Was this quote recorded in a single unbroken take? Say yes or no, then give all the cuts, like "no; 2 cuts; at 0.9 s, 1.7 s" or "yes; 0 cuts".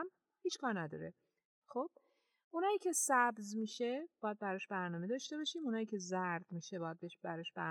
no; 1 cut; at 1.5 s